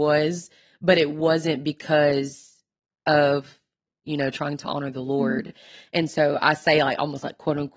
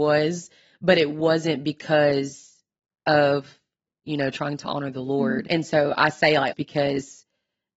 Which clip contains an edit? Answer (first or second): second